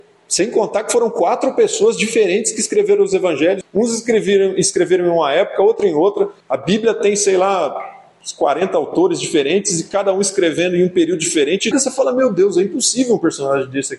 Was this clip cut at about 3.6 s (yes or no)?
yes